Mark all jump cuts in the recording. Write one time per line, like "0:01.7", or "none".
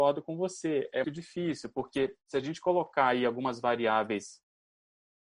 0:01.0